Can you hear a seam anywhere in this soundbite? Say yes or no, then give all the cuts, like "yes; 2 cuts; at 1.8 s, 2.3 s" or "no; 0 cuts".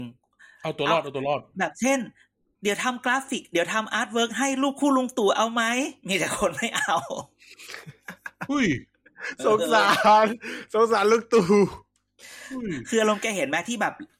no; 0 cuts